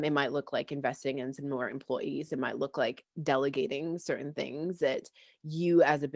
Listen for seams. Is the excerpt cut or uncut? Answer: uncut